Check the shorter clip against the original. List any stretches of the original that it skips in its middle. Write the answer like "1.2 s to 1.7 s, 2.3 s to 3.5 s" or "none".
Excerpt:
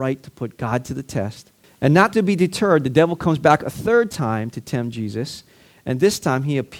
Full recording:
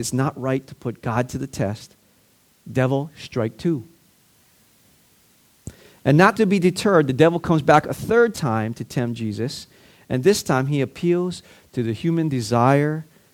2.1 s to 5.9 s